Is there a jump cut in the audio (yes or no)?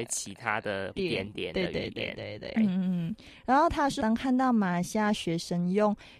yes